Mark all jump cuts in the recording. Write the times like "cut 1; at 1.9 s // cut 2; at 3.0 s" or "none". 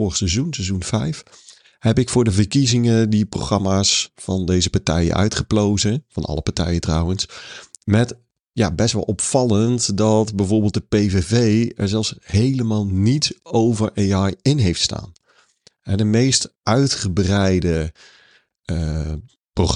none